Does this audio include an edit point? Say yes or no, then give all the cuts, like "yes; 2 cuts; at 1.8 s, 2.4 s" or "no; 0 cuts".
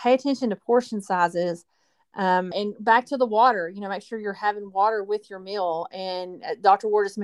yes; 1 cut; at 2.5 s